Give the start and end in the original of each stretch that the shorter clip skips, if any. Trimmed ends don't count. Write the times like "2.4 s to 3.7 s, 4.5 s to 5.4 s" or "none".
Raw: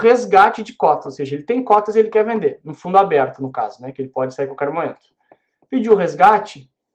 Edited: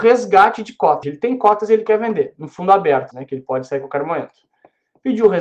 1.0 s to 1.3 s, 3.4 s to 3.8 s